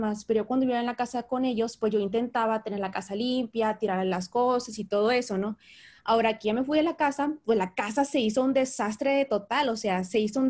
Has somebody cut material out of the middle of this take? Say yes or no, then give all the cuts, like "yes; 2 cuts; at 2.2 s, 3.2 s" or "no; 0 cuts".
no; 0 cuts